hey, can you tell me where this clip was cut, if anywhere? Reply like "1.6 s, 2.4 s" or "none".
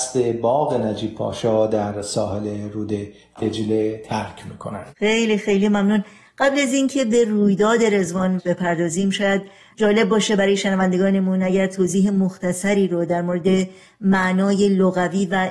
5.0 s

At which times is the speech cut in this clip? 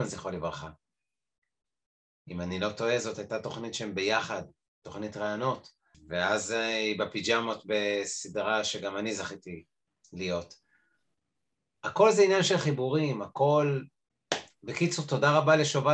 none

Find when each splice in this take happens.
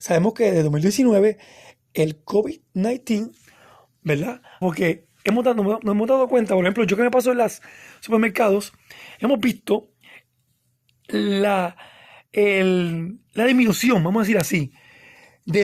4.6 s, 13.3 s

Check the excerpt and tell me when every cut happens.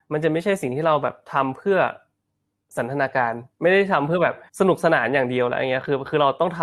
4.5 s

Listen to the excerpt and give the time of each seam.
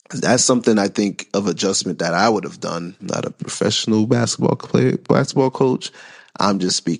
3.0 s

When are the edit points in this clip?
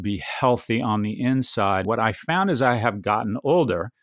1.8 s

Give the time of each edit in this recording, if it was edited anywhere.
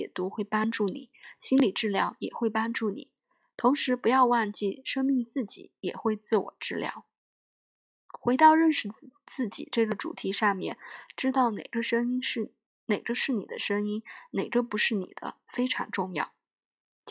none

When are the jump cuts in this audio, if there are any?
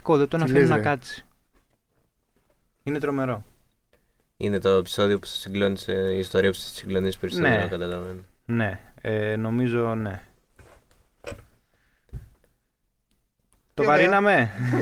none

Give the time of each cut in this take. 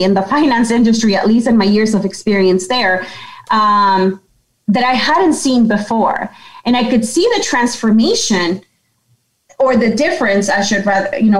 none

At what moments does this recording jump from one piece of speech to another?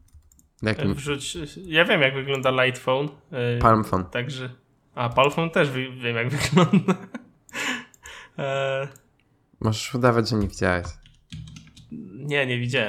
none

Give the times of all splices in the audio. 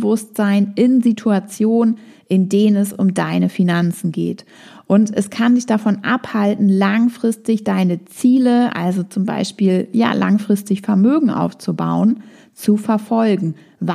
none

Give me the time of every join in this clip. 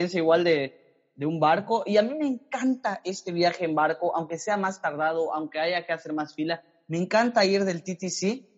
none

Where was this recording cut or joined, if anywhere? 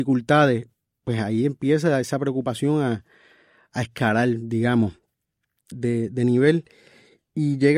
5.7 s

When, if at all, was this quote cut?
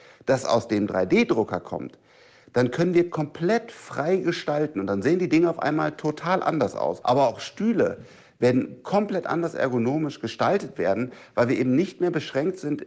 7.0 s

